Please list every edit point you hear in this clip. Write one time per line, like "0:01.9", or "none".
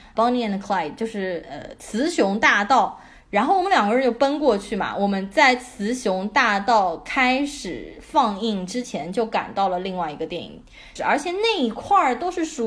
0:11.0